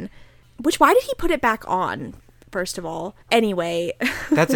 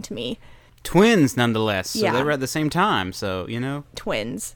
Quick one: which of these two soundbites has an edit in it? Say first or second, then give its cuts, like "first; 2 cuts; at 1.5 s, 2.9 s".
first; 1 cut; at 3.2 s